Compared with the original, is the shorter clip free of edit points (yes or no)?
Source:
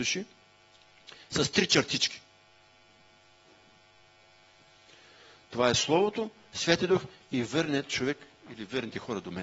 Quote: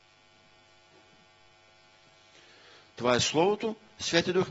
yes